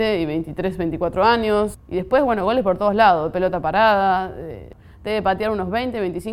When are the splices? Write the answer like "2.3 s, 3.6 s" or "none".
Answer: 1.7 s